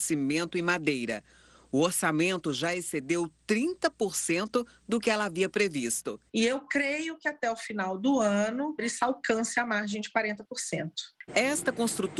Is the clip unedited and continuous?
no; 2 cuts; at 8.8 s, 11.3 s

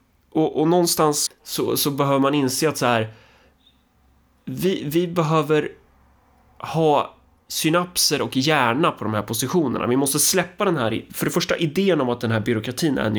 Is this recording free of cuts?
no; 1 cut; at 1.3 s

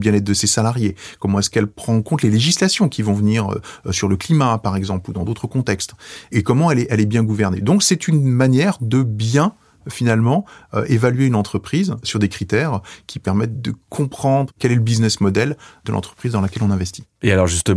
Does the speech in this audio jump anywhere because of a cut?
no; 0 cuts

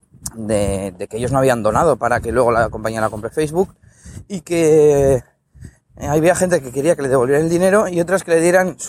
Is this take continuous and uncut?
yes; 0 cuts

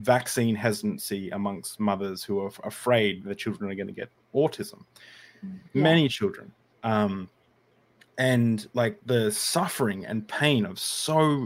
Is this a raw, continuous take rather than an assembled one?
no; 2 cuts; at 5.7 s, 8.7 s

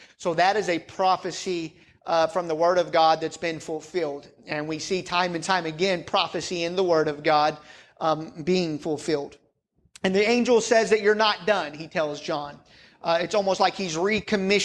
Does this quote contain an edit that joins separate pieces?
no; 0 cuts

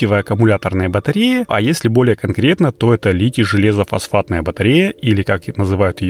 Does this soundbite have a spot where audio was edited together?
yes; 1 cut; at 1.5 s

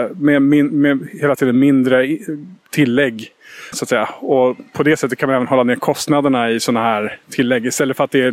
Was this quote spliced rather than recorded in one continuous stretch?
yes; 1 cut; at 3.7 s

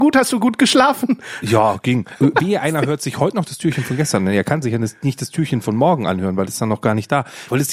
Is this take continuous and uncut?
yes; 0 cuts

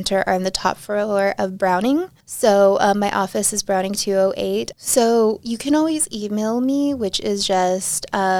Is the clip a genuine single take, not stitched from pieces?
no; 2 cuts; at 2.2 s, 4.7 s

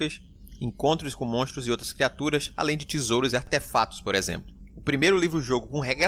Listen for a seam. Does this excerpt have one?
no; 0 cuts

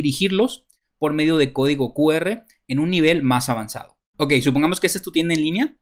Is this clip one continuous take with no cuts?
yes; 0 cuts

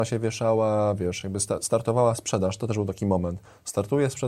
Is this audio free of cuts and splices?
yes; 0 cuts

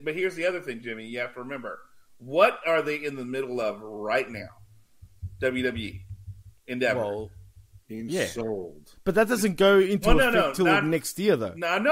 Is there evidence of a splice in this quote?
no; 0 cuts

